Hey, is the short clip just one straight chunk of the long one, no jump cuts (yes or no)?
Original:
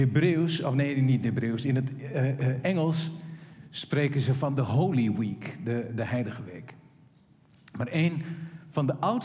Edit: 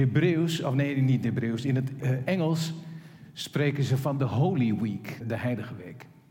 no